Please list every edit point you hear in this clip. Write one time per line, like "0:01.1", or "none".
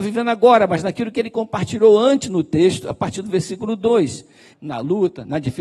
0:04.5

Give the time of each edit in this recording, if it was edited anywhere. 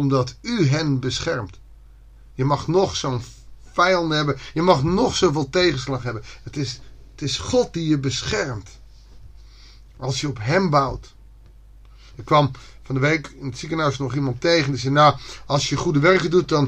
none

